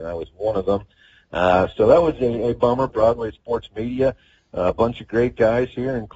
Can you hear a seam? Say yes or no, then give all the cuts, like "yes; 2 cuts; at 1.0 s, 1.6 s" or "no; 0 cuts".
yes; 1 cut; at 2.9 s